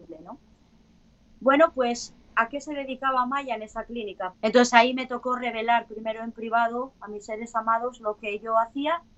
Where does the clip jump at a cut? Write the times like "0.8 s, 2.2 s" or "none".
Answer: 4.3 s